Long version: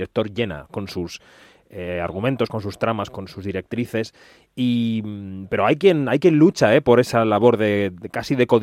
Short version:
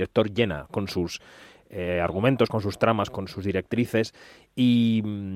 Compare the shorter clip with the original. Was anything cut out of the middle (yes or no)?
no